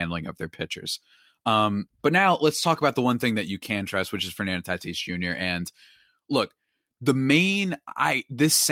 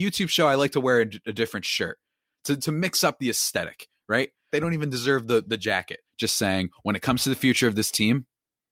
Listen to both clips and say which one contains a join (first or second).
second